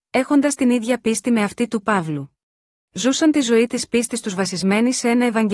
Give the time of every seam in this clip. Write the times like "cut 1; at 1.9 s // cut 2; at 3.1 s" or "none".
cut 1; at 2.8 s